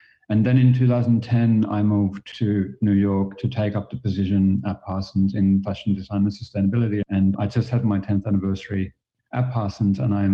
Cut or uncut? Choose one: uncut